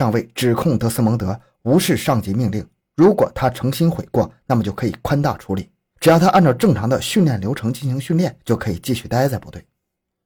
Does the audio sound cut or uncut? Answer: uncut